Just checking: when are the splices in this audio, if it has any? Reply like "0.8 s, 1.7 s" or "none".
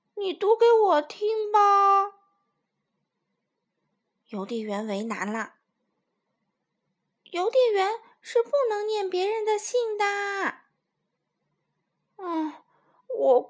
none